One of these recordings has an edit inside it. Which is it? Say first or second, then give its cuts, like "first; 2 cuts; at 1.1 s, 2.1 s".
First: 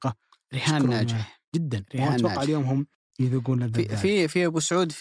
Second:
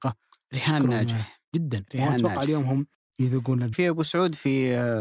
second; 1 cut; at 3.7 s